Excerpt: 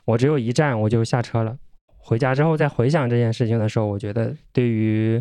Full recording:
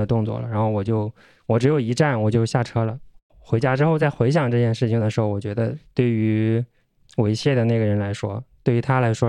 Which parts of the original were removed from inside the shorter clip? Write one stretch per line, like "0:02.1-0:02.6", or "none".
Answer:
none